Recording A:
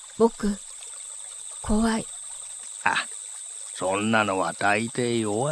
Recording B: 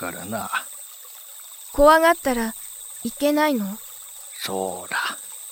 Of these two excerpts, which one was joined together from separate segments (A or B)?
A